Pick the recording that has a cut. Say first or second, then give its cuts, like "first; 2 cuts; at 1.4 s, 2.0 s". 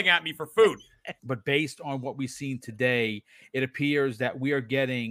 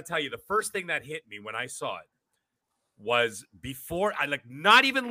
first; 1 cut; at 1.2 s